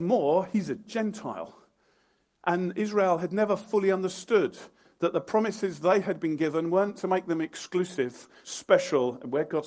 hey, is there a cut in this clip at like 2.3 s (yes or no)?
no